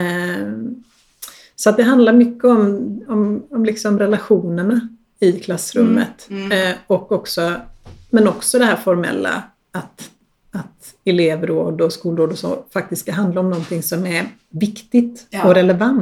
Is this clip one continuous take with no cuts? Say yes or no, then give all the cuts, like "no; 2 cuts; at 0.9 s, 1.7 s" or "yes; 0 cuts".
yes; 0 cuts